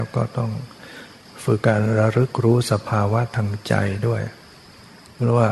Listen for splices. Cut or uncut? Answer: cut